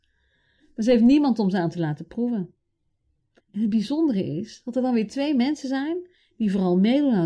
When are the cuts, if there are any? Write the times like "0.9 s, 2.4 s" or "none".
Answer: 3.4 s